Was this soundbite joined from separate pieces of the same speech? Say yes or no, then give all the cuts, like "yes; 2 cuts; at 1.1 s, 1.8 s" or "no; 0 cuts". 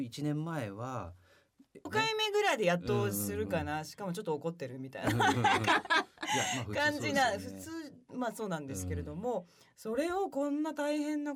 yes; 1 cut; at 1.9 s